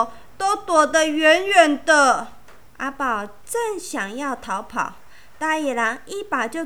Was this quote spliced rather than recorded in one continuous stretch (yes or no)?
yes